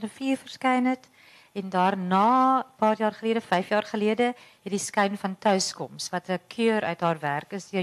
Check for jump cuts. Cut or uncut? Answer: uncut